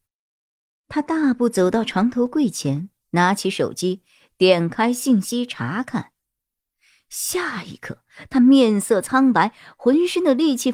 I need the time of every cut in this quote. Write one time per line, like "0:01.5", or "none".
none